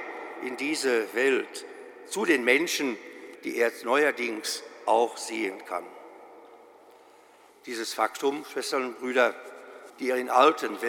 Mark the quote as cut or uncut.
cut